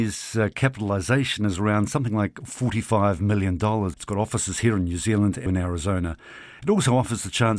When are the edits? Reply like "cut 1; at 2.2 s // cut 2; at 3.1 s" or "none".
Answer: cut 1; at 3.9 s // cut 2; at 5.5 s // cut 3; at 6.6 s